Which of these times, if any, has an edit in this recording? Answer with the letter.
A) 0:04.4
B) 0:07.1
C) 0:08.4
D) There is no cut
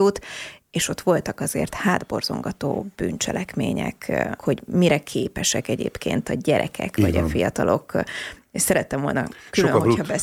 A